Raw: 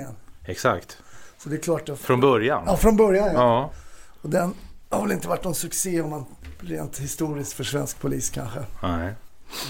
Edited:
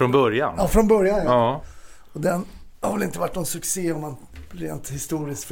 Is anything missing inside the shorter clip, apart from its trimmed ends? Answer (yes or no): no